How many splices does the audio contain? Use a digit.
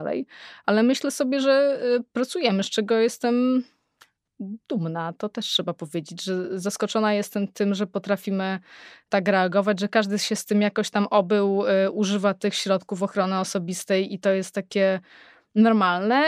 0